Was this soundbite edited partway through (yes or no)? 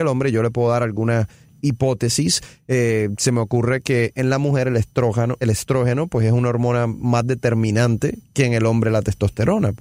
no